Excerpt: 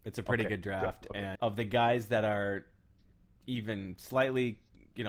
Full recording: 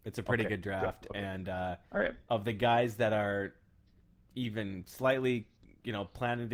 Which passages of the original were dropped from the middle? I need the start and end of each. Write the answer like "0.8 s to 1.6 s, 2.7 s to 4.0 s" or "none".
1.4 s to 2.2 s